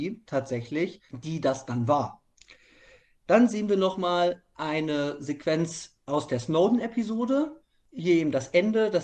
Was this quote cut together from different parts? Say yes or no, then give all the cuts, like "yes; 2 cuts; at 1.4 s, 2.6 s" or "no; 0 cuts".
no; 0 cuts